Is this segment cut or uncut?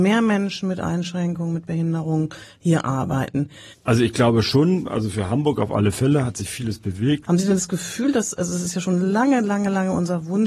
cut